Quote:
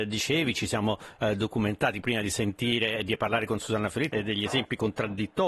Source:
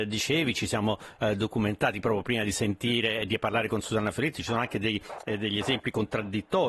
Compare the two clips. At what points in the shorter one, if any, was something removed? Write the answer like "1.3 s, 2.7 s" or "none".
2.0 s, 4.1 s